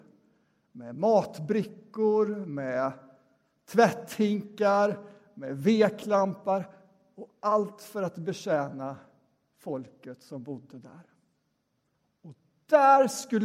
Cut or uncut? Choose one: uncut